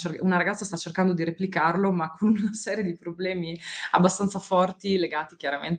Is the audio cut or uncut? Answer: uncut